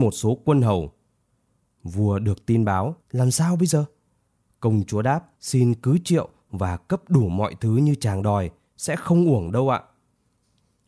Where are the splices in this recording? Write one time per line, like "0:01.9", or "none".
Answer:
0:03.0
0:05.3